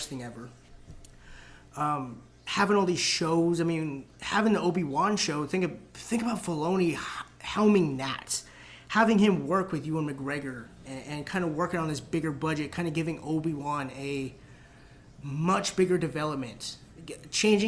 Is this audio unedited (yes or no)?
yes